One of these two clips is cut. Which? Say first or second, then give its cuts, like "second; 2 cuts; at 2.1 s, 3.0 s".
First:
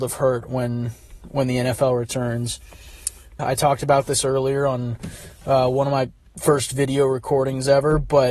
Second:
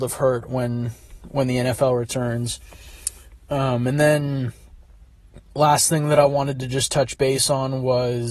first; 1 cut; at 3.4 s